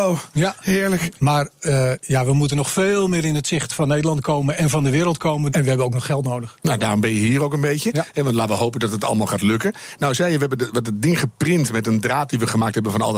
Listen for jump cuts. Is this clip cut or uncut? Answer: cut